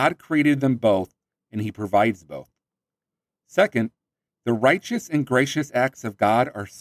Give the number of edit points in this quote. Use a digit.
0